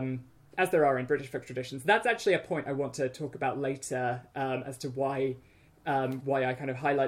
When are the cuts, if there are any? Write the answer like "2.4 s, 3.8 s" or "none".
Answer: none